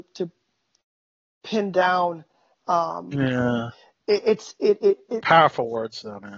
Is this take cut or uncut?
uncut